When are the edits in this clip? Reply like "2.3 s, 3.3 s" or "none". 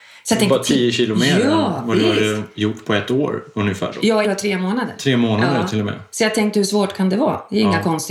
4.2 s